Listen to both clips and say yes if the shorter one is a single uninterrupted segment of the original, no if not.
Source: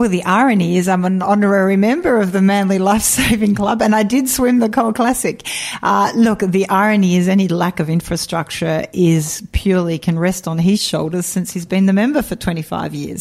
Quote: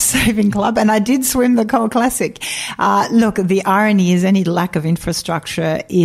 yes